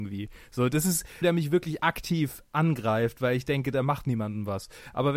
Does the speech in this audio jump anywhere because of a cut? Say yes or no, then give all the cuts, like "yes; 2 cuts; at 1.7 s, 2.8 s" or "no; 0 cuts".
yes; 2 cuts; at 1.2 s, 3.7 s